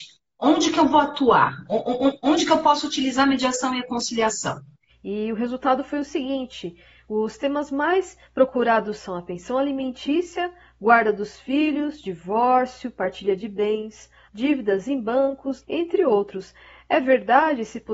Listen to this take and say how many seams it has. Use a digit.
3